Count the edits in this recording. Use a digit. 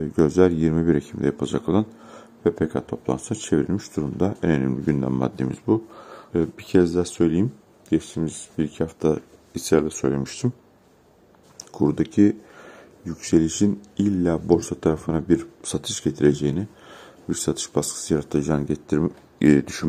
1